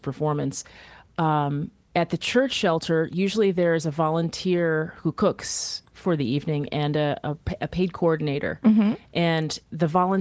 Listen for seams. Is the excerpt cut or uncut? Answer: uncut